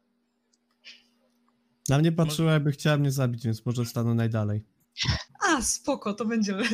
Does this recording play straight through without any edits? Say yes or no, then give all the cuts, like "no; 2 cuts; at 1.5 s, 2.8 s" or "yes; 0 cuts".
no; 1 cut; at 5.3 s